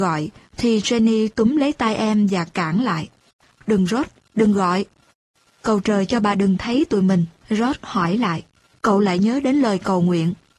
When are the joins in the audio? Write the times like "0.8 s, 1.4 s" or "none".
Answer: 7.4 s, 8.7 s